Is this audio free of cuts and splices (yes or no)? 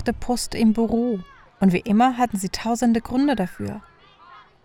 no